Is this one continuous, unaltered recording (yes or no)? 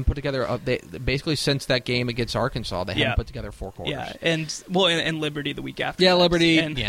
yes